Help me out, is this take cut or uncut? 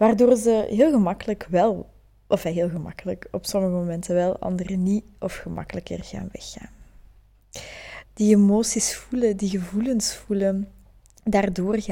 cut